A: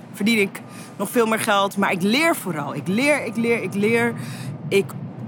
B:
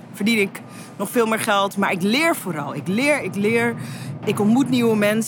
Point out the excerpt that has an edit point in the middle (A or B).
B